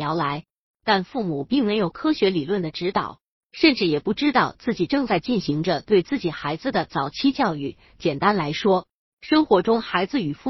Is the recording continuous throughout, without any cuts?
yes; 0 cuts

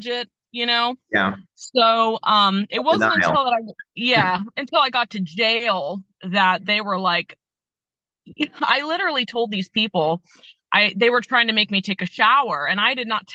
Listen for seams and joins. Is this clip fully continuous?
yes; 0 cuts

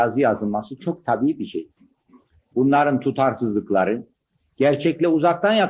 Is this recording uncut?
no; 1 cut; at 2.5 s

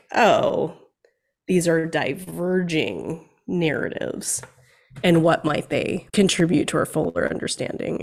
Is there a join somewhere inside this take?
no; 0 cuts

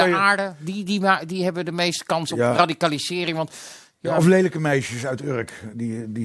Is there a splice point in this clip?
no; 0 cuts

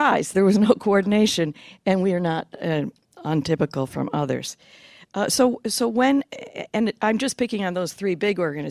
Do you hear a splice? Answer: no; 0 cuts

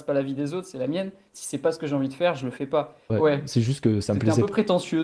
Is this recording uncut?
no; 1 cut; at 3.1 s

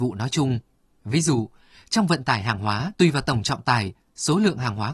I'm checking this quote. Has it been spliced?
yes; 2 cuts; at 1.0 s, 2.9 s

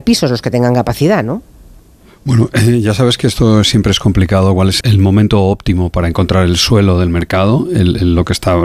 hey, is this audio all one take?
no; 1 cut; at 4.8 s

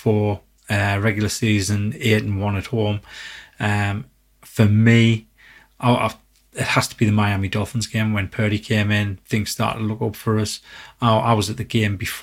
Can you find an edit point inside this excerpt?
no; 0 cuts

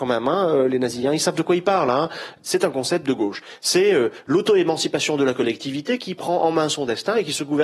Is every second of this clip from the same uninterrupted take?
no; 1 cut; at 2.4 s

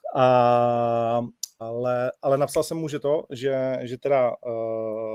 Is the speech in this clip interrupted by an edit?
yes; 1 cut; at 1.6 s

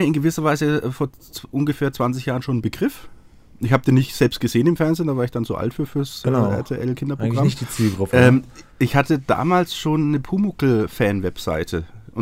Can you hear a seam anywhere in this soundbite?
yes; 1 cut; at 8.7 s

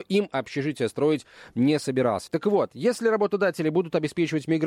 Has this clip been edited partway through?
yes; 1 cut; at 2.3 s

